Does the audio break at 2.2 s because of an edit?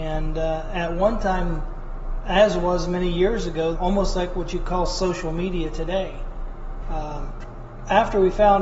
no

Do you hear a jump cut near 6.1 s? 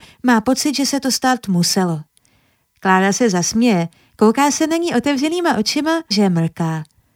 yes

